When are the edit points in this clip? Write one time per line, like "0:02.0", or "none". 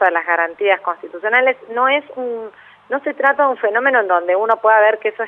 none